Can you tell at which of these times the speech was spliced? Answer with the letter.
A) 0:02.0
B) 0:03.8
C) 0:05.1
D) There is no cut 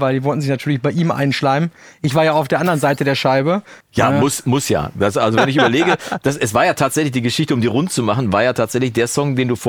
B